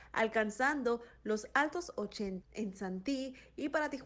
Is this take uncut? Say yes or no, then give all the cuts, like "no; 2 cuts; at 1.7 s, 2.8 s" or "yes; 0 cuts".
no; 1 cut; at 2.4 s